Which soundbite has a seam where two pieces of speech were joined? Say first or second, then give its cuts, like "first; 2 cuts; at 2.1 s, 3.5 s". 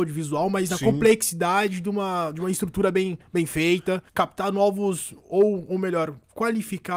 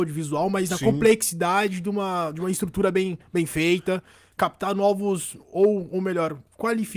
first; 1 cut; at 4.1 s